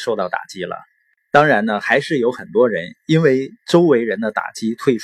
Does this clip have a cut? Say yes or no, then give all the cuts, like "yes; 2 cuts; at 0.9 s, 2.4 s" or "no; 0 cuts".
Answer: no; 0 cuts